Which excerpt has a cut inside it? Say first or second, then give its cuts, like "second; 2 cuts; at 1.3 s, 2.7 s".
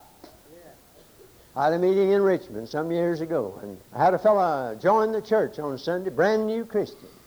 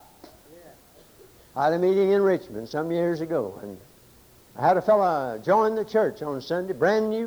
first; 1 cut; at 3.8 s